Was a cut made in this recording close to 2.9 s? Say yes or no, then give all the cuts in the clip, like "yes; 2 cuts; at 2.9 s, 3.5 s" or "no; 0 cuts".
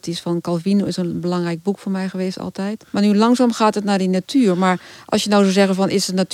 yes; 1 cut; at 2.9 s